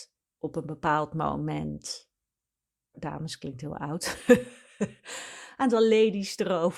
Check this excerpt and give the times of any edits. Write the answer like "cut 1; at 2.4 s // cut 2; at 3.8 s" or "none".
cut 1; at 2.9 s